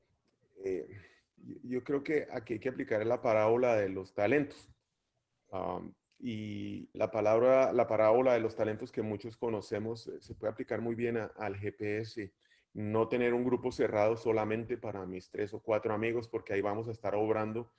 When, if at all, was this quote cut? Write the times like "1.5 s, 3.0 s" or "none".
6.9 s, 12.6 s